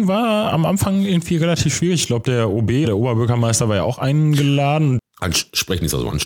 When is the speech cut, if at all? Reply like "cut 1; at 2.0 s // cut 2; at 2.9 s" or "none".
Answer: cut 1; at 2.8 s // cut 2; at 5.0 s

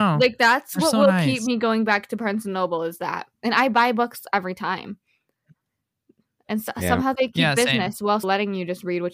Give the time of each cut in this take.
cut 1; at 8.2 s

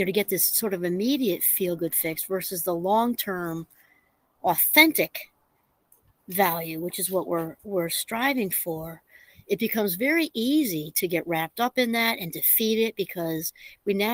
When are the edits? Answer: none

